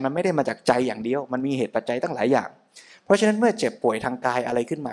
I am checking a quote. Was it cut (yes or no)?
no